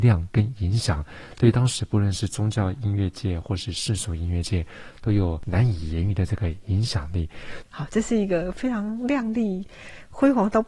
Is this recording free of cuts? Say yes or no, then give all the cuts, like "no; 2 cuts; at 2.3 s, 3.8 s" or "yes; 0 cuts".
no; 1 cut; at 7.6 s